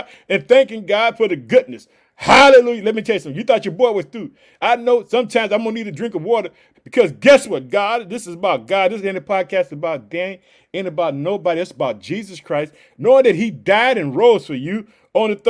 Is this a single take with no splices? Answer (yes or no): no